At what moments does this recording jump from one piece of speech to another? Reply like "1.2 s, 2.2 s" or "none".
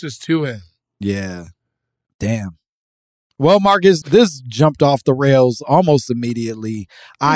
4.0 s